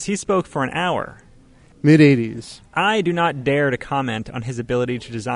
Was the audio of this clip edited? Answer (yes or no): yes